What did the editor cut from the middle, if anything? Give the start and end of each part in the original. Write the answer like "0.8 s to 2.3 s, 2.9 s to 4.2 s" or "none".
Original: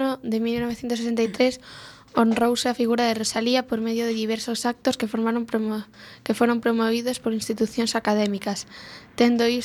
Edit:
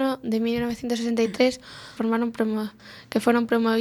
2.0 s to 5.1 s